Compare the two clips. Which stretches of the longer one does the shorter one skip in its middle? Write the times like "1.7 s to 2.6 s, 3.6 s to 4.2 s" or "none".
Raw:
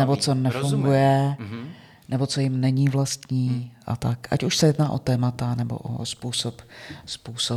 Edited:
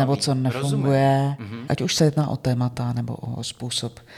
1.7 s to 4.3 s